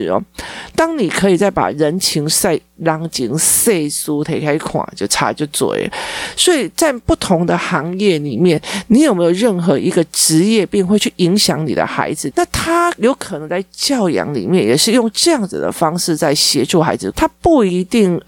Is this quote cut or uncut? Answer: cut